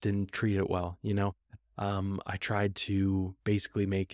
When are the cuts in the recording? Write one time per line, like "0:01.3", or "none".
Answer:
0:01.6